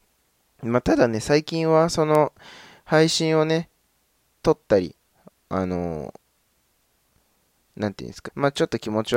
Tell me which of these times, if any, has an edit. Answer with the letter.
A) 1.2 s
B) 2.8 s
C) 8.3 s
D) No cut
C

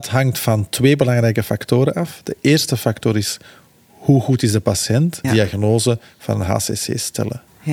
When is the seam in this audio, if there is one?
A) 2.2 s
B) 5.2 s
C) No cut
B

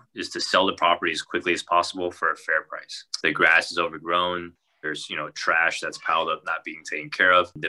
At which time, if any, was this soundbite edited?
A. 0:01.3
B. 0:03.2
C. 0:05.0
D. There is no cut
B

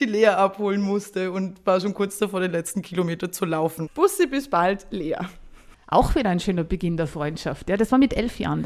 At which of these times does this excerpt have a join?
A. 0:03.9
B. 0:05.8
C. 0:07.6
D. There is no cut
A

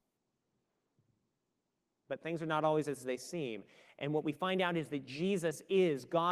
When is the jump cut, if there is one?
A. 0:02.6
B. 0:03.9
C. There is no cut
C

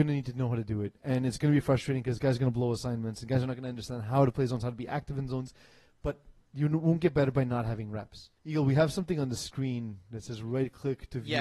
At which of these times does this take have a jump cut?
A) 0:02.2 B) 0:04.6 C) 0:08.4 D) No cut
C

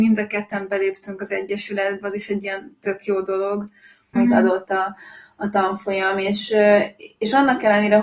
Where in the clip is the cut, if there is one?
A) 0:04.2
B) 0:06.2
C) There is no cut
A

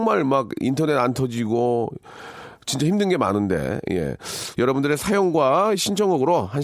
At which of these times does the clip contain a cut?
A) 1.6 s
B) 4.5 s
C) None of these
B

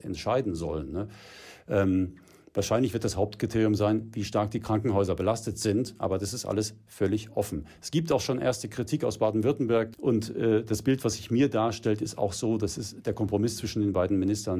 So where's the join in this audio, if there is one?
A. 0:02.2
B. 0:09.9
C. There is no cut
B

